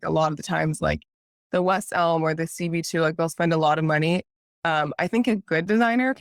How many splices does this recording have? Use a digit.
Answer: 0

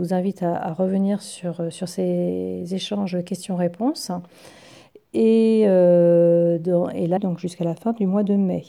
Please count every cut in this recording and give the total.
1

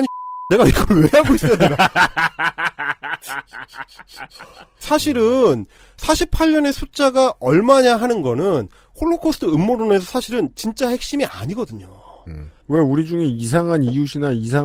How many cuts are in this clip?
2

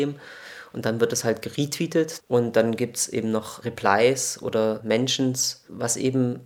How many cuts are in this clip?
1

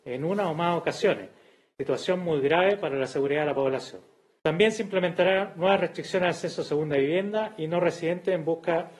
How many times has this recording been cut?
0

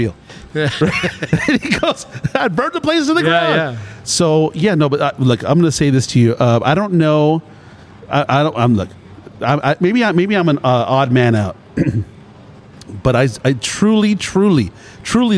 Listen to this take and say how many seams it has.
0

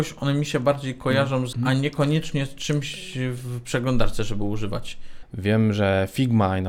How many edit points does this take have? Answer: 2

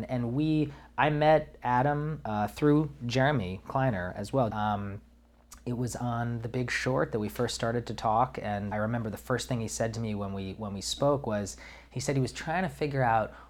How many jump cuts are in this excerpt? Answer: 2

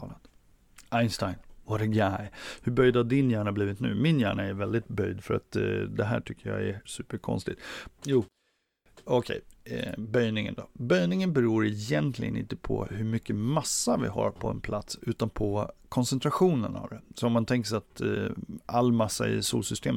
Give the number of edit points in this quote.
2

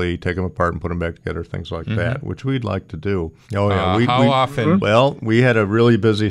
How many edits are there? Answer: 1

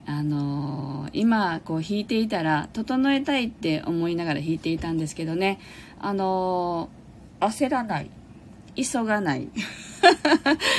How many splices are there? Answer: 0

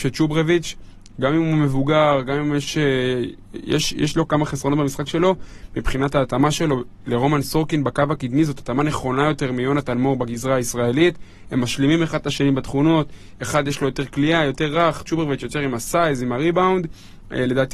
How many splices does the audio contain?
0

